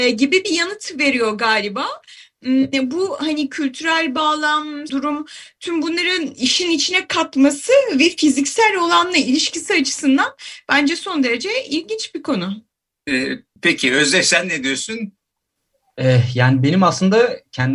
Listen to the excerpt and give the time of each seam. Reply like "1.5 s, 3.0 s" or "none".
4.9 s